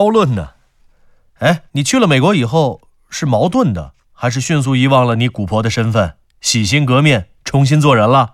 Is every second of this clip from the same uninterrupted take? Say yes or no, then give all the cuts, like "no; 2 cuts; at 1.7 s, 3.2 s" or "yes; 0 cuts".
no; 1 cut; at 1.7 s